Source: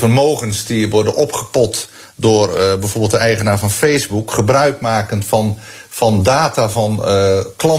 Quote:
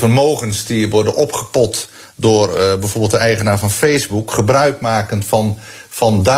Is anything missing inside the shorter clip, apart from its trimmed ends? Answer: no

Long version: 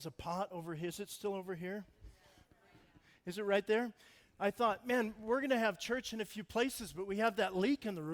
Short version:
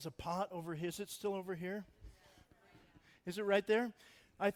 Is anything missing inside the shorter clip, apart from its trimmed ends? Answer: no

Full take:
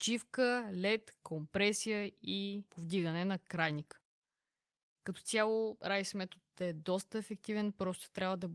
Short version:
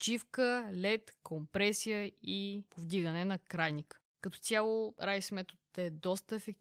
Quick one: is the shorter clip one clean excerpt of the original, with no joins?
no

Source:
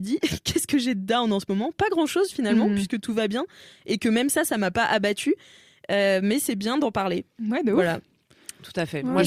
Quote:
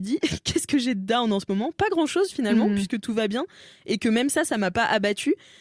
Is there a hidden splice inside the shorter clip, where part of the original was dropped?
no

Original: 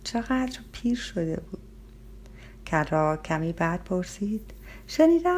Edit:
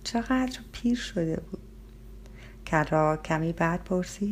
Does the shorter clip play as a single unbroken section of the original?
yes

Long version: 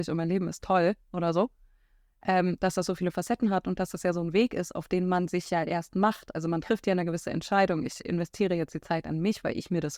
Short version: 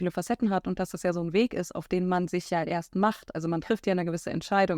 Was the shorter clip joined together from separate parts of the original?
no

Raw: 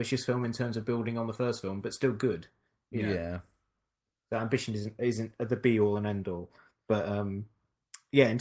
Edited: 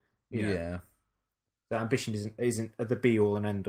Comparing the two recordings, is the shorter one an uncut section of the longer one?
yes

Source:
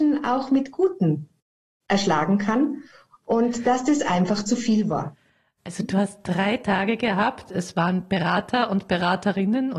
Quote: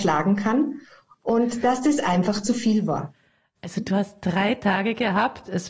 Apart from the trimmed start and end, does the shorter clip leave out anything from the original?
no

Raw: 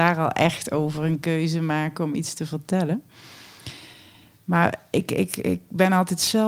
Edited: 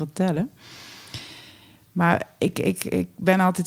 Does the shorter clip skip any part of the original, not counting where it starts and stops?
no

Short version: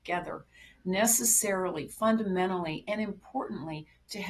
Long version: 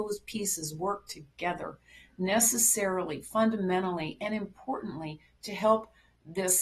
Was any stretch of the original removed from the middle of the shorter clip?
no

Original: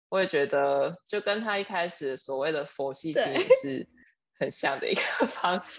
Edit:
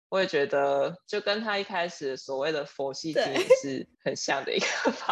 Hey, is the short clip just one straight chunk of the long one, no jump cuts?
no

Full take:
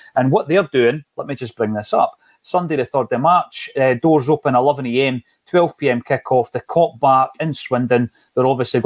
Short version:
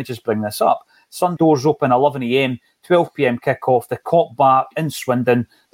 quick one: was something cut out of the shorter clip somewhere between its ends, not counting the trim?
yes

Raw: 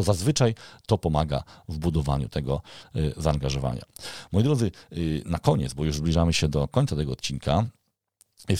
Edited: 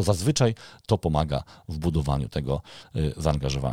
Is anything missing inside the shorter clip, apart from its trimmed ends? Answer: no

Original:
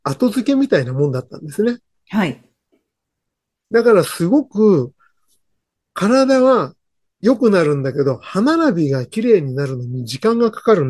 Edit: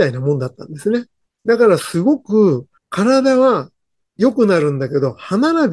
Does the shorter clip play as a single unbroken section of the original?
no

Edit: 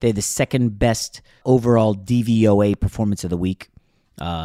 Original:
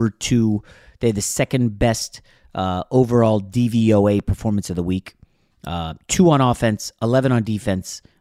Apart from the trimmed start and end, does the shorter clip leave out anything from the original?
yes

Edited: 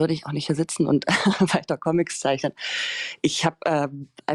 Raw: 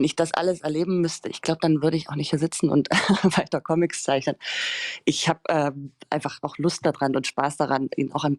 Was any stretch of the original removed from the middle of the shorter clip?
no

